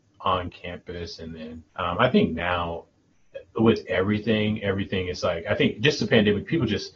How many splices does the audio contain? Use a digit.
1